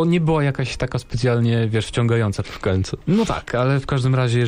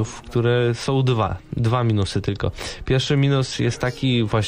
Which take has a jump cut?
first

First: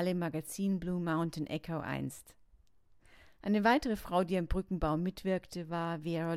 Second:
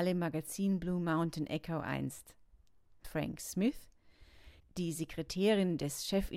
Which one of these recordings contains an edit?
second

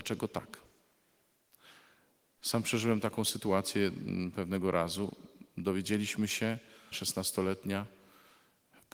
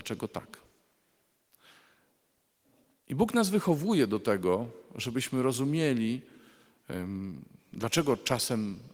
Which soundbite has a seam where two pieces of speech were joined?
first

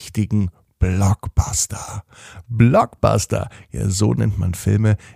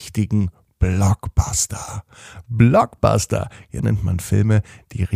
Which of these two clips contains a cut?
second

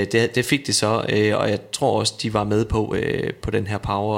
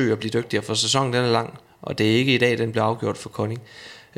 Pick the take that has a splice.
first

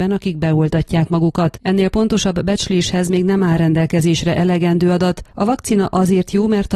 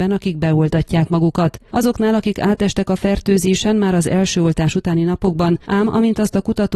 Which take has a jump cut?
second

